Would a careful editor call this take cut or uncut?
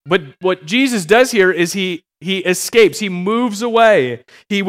uncut